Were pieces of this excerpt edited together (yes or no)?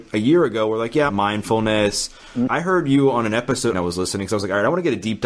yes